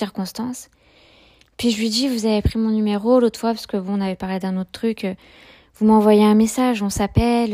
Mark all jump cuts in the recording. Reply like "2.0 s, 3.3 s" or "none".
none